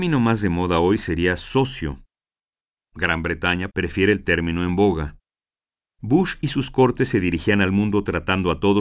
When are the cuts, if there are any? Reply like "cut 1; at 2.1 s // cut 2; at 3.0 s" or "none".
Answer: cut 1; at 3.7 s